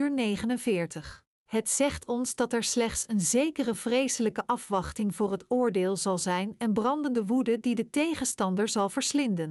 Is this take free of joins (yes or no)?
no